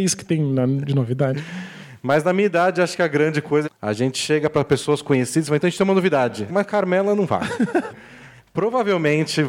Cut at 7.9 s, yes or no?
yes